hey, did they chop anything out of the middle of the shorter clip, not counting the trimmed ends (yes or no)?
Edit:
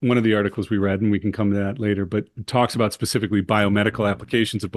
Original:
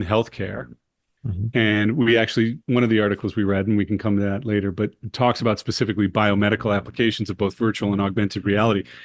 no